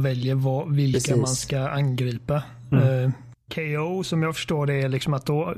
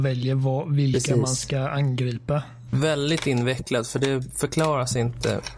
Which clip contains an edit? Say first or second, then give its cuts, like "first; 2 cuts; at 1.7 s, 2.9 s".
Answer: second; 1 cut; at 2.7 s